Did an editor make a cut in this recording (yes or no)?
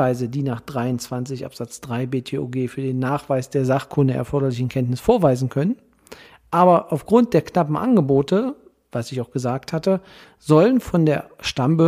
yes